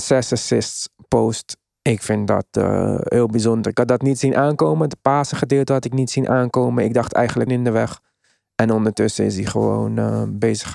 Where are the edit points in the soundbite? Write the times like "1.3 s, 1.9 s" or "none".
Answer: 7.5 s